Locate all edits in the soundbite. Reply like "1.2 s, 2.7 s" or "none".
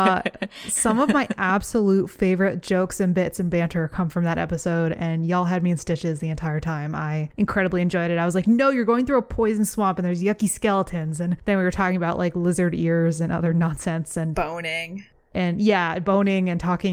none